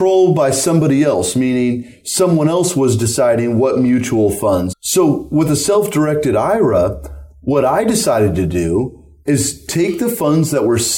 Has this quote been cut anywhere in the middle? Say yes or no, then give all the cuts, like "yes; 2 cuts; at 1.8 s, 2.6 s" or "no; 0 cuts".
yes; 1 cut; at 4.7 s